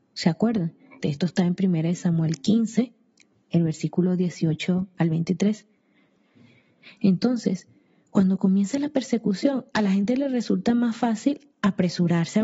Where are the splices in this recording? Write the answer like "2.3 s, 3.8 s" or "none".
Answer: 1.0 s